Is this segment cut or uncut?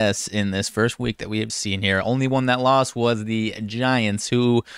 cut